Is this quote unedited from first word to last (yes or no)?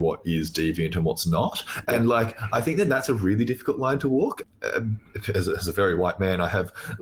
yes